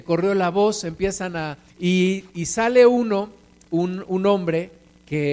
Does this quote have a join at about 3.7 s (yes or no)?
no